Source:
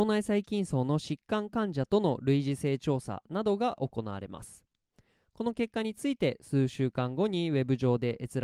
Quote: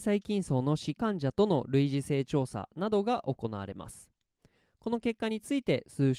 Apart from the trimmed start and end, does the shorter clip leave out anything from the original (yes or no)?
yes